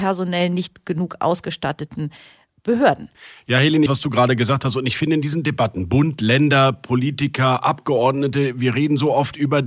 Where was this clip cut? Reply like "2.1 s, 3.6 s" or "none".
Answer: 3.9 s